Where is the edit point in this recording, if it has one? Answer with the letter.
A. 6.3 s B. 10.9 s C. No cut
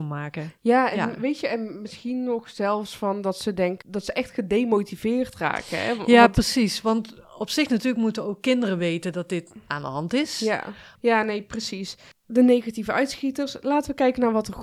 B